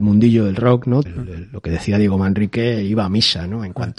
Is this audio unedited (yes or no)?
no